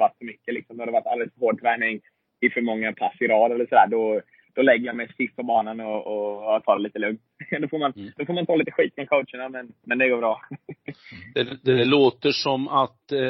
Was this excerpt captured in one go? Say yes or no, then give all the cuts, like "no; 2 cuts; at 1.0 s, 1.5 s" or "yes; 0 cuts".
yes; 0 cuts